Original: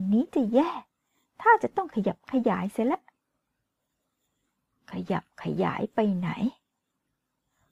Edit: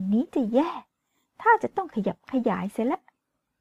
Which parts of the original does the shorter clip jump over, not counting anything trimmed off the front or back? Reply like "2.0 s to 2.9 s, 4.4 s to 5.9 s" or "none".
none